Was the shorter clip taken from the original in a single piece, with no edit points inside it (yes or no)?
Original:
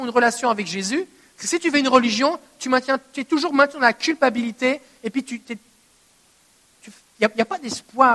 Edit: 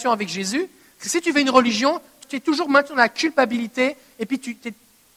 no